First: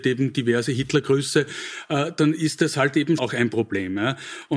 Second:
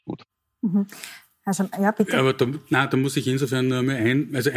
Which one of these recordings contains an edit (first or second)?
first